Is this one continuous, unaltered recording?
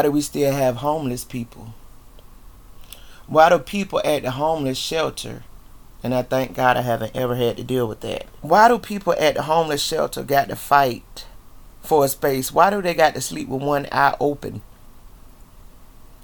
yes; 0 cuts

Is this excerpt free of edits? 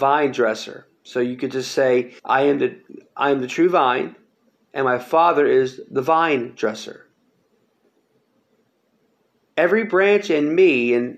no; 1 cut; at 2.2 s

